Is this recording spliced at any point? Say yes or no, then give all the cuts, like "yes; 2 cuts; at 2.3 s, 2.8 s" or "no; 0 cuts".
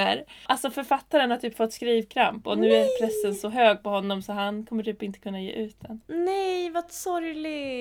no; 0 cuts